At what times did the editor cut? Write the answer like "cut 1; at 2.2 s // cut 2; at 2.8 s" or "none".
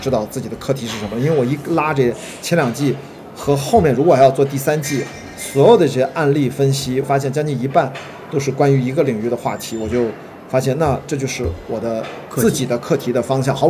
cut 1; at 7.0 s